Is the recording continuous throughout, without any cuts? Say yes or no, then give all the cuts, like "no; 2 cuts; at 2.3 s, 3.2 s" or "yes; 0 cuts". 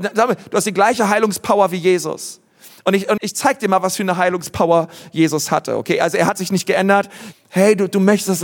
no; 2 cuts; at 3.2 s, 7.3 s